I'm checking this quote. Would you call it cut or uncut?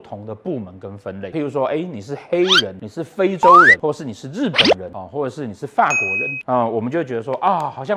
uncut